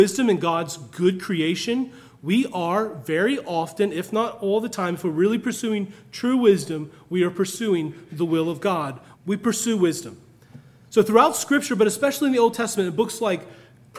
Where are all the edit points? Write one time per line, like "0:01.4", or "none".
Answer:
0:09.1